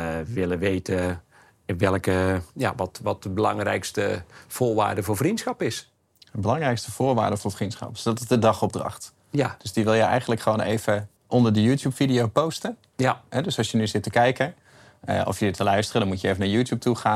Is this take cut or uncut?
cut